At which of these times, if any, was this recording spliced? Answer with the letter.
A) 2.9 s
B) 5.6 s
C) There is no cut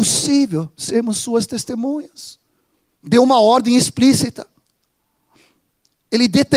A